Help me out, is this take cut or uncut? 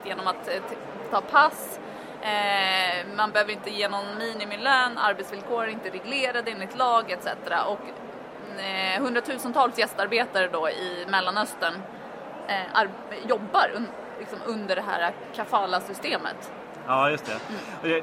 cut